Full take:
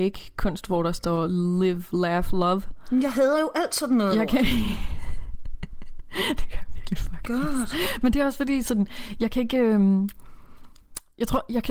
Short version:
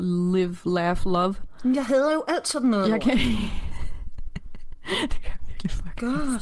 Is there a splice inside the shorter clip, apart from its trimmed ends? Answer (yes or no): no